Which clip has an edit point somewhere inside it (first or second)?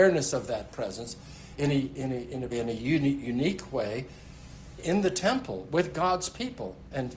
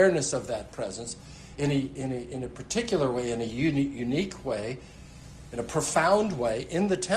first